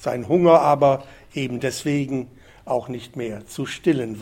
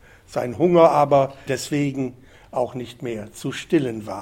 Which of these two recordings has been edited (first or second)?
second